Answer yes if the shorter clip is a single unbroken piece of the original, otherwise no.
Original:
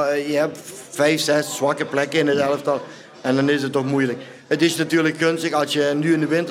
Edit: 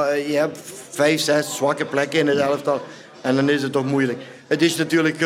yes